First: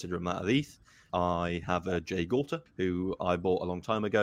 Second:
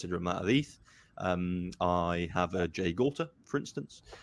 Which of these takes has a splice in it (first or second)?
first